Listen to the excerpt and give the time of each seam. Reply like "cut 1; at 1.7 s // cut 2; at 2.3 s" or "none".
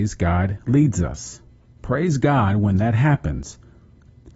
cut 1; at 1.7 s